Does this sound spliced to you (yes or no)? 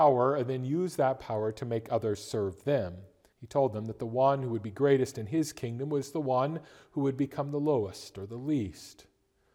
yes